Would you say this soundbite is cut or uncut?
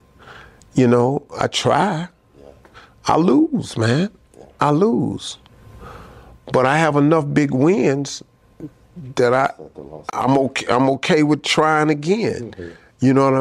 uncut